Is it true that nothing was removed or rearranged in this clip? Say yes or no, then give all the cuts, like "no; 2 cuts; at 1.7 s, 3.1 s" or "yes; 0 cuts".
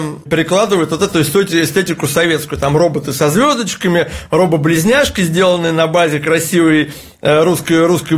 yes; 0 cuts